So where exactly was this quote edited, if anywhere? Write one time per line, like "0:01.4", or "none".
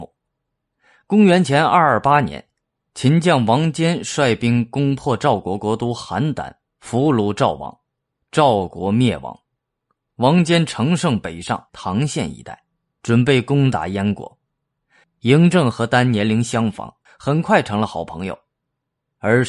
0:11.7
0:15.0
0:17.1